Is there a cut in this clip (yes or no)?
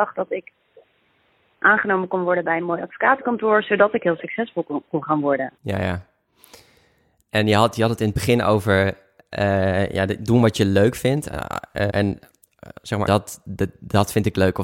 yes